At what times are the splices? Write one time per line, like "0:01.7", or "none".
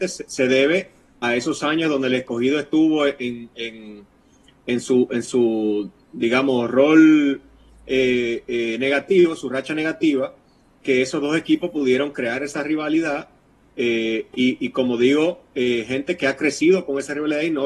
none